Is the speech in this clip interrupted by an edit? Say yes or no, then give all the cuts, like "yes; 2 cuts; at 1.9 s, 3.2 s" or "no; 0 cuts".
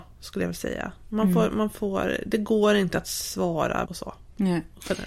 yes; 1 cut; at 3.8 s